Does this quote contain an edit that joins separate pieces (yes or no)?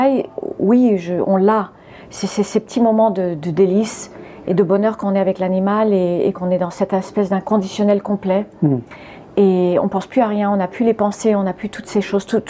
no